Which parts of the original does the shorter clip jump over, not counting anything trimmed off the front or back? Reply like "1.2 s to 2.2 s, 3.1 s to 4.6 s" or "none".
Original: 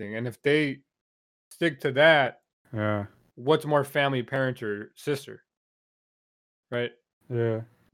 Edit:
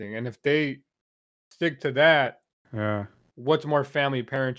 none